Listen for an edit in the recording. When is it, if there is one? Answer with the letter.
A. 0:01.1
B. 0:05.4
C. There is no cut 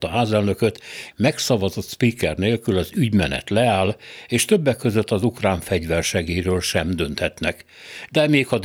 A